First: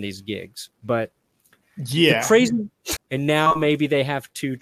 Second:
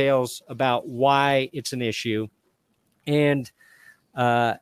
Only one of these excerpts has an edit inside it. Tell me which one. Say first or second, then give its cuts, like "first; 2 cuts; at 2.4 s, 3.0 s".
first; 1 cut; at 3.0 s